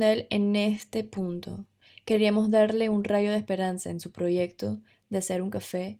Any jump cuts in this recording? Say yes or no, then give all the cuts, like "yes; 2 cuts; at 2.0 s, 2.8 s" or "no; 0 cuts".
no; 0 cuts